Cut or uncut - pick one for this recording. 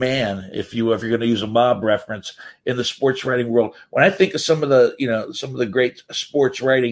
uncut